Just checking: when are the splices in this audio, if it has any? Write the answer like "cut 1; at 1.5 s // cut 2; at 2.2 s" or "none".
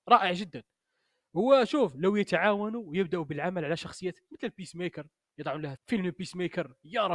cut 1; at 5.8 s